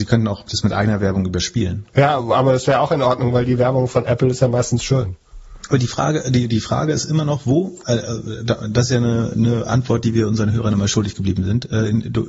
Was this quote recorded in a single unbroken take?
yes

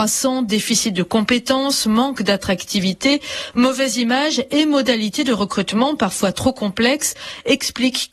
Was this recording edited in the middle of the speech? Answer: no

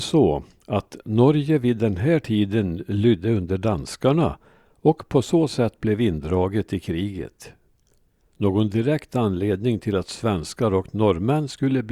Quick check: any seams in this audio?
no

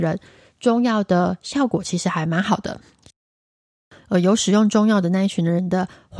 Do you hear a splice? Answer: no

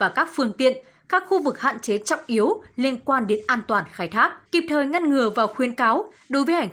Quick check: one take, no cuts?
no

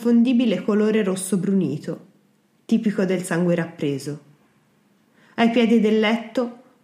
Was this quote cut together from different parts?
no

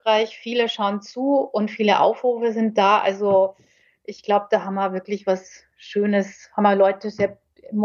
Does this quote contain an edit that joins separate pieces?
no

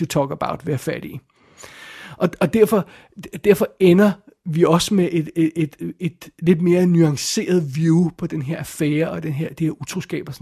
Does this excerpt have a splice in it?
no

